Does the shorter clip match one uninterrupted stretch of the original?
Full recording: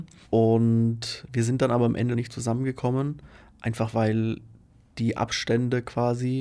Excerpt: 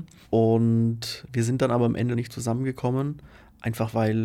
yes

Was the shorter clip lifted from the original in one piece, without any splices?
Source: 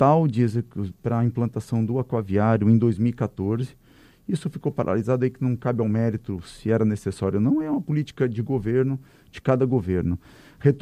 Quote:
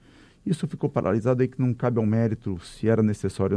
yes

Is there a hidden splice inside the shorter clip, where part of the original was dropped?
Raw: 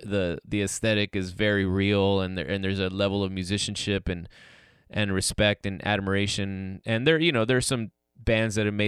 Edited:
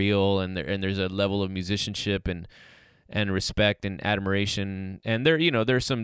no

